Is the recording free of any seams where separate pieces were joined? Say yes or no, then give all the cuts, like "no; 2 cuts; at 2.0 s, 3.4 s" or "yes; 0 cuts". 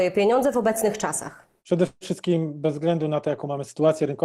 yes; 0 cuts